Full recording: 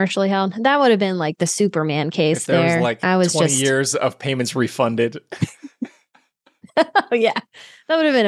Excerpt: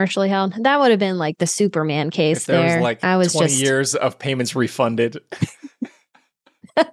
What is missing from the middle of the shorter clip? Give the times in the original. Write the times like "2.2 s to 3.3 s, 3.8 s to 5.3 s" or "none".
none